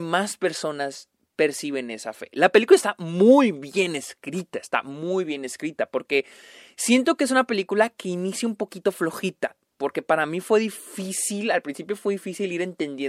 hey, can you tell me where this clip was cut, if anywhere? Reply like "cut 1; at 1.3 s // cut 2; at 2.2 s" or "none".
none